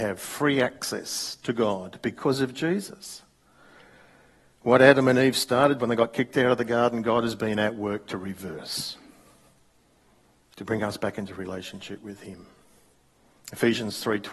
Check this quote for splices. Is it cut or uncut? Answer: uncut